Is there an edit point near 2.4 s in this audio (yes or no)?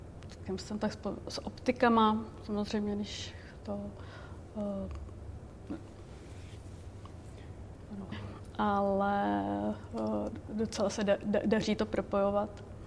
no